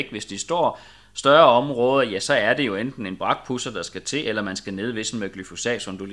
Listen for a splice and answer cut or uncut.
uncut